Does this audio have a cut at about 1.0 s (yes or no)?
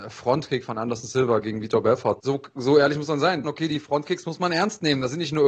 no